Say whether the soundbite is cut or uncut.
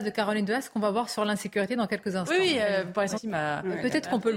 cut